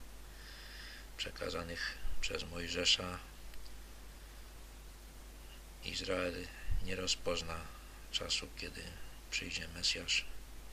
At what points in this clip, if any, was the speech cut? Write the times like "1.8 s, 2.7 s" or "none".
none

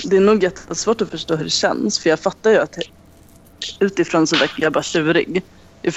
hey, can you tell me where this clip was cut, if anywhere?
none

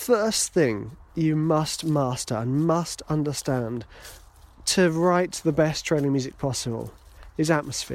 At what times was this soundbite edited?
none

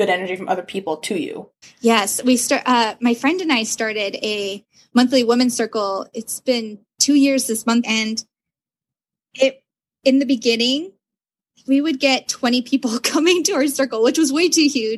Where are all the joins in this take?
1.6 s, 7.8 s

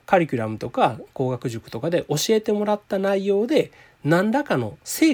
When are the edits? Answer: none

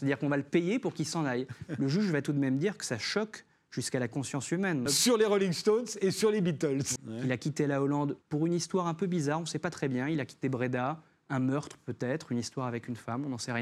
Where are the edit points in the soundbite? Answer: 4.9 s, 7.0 s, 8.2 s

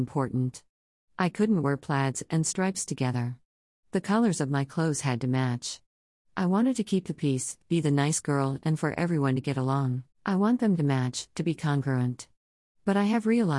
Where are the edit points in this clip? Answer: 7.6 s, 10.1 s

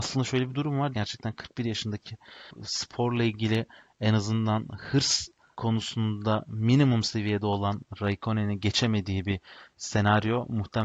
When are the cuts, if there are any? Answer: 0.9 s

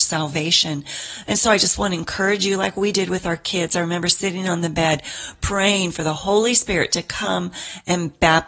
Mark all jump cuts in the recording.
none

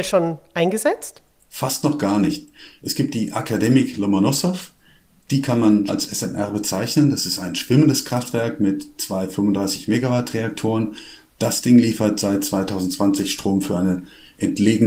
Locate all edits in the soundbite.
5.9 s

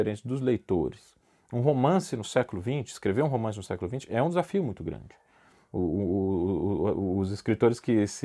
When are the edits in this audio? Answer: none

